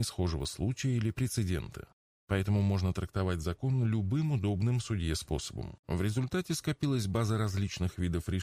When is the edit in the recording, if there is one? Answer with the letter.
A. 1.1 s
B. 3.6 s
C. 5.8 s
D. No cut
C